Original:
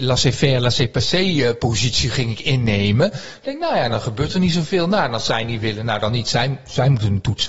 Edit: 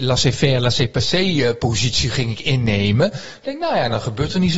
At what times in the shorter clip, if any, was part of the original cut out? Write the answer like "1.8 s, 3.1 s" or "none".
none

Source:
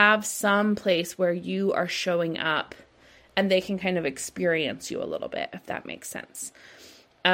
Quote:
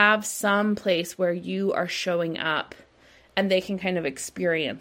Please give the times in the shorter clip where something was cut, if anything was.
none

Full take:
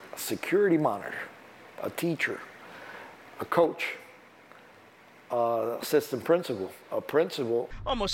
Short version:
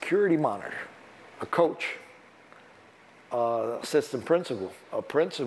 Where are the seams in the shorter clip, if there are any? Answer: 1.3 s

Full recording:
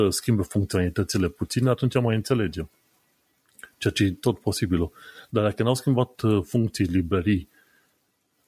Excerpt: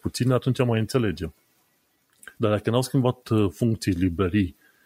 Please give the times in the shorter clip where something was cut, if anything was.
2.3 s

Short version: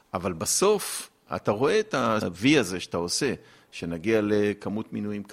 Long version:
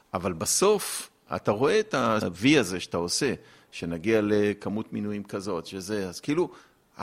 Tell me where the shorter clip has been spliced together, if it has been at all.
none

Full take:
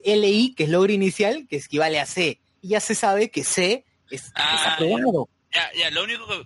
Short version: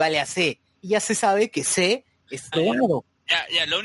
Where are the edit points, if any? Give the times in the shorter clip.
2.5 s

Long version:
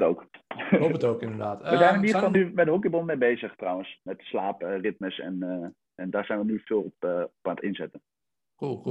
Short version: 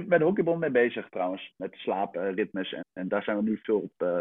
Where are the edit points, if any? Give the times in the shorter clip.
2.8 s

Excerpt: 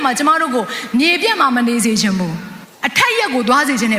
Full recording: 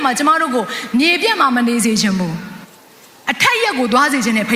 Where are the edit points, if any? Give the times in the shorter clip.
2.7 s

